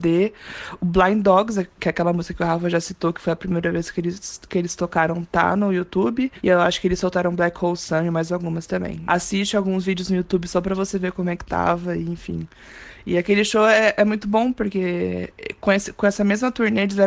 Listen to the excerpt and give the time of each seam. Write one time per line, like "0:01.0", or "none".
0:09.1

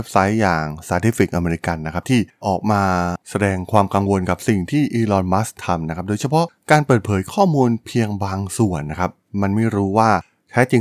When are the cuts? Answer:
0:02.4

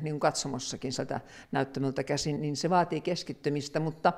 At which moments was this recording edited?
0:02.4

